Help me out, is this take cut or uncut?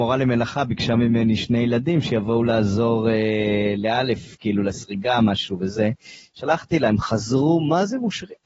uncut